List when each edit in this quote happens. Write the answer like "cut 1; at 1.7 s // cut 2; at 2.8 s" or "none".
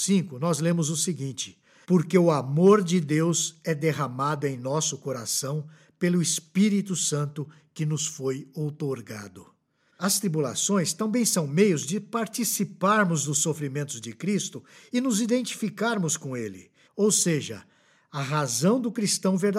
cut 1; at 9.9 s // cut 2; at 16.8 s